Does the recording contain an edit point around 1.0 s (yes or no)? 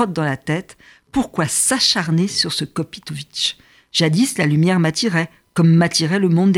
no